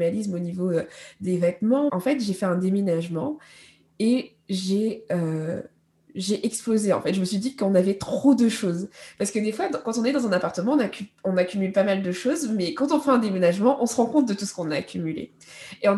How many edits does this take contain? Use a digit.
1